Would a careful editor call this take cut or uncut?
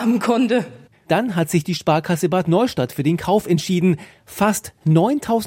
cut